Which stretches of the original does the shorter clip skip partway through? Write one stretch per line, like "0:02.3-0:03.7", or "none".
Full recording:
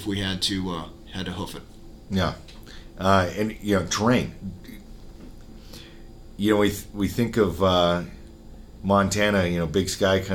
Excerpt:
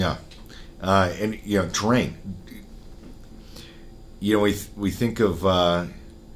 none